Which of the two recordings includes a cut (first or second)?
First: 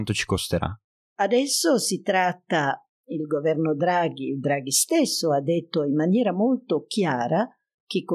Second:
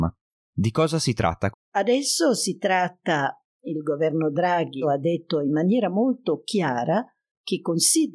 second